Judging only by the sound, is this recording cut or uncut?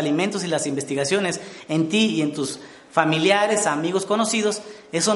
uncut